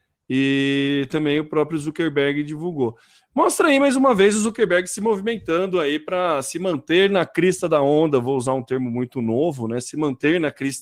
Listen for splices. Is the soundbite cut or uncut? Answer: uncut